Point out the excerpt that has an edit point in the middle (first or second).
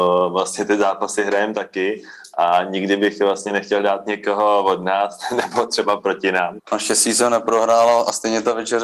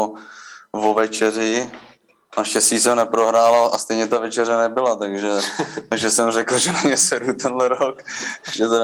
first